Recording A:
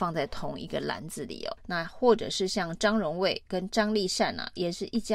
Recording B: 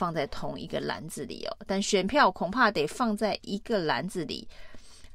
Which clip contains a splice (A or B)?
A